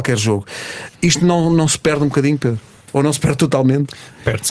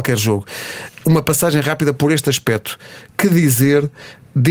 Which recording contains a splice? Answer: first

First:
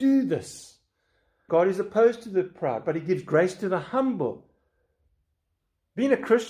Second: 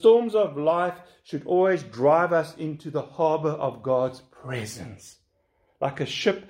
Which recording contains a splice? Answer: first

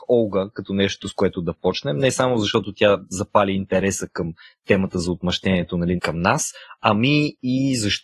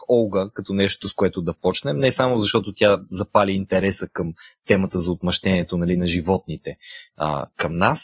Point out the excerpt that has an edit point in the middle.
first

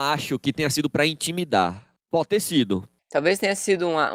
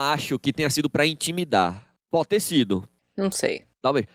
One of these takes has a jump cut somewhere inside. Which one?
second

